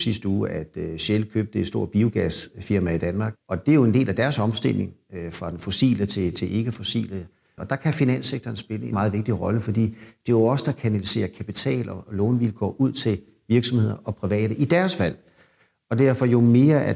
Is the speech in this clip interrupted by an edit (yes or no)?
yes